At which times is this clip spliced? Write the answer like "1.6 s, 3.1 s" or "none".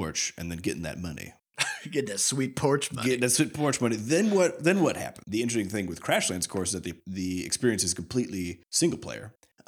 5.2 s